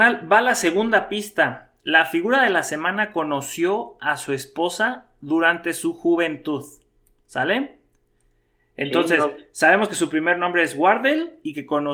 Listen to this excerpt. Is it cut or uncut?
uncut